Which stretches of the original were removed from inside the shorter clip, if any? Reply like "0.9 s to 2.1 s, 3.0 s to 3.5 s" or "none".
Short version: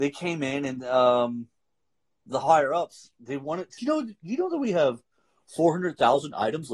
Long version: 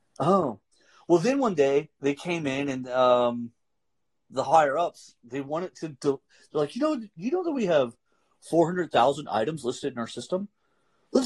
5.8 s to 6.7 s